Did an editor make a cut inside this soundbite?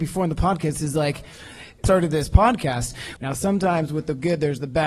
yes; 2 cuts; at 1.8 s, 3.2 s

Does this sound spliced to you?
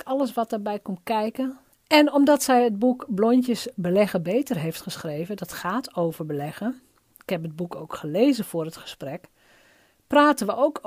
yes; 1 cut; at 1.7 s

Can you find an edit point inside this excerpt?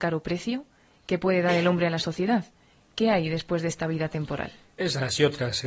yes; 1 cut; at 2.7 s

